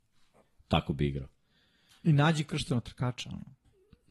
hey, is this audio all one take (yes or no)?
yes